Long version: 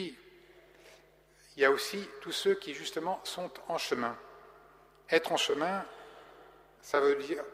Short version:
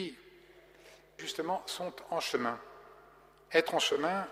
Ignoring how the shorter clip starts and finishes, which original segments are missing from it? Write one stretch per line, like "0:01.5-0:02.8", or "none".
0:01.2-0:02.8